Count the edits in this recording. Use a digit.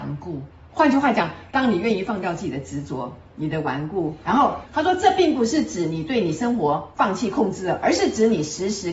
1